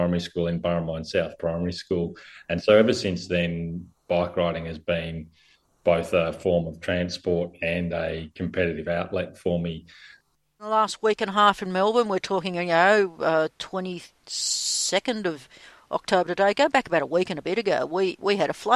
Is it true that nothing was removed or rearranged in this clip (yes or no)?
yes